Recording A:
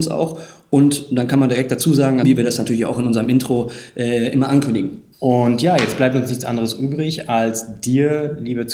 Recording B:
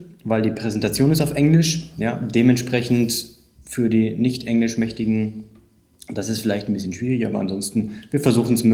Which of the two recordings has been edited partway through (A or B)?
A